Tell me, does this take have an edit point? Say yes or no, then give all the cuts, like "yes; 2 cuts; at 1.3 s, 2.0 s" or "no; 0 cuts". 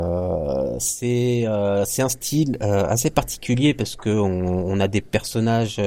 no; 0 cuts